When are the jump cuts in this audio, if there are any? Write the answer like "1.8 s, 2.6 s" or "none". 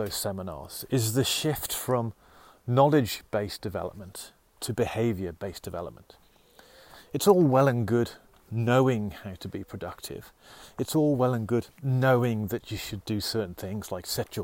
none